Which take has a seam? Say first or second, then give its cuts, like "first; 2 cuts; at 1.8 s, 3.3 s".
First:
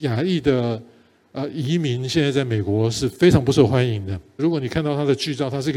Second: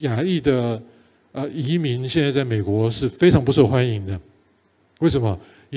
first; 1 cut; at 4.4 s